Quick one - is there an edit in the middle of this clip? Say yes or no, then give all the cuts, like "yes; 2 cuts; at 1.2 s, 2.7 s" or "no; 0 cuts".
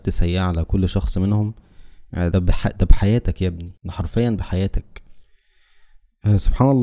yes; 2 cuts; at 2.3 s, 3.8 s